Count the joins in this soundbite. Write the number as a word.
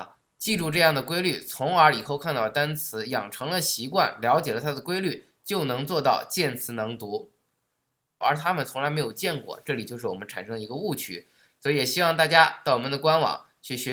one